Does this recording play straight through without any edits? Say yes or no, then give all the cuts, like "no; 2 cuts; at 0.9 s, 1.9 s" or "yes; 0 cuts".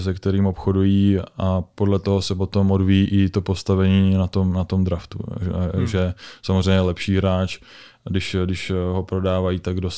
yes; 0 cuts